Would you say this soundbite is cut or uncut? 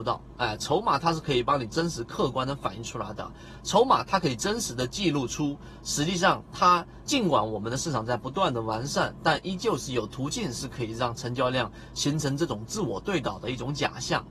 cut